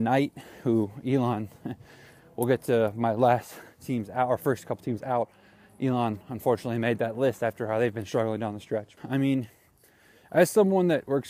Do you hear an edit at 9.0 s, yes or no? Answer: yes